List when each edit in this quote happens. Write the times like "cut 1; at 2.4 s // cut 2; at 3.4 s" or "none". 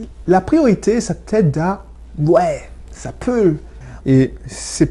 cut 1; at 4.0 s